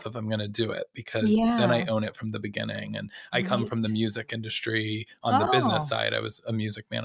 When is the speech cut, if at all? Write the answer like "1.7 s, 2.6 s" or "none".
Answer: none